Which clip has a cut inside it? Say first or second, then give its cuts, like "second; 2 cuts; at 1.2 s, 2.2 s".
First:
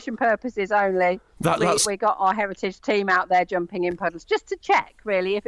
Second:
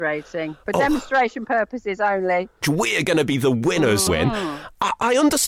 second; 2 cuts; at 2.6 s, 4.1 s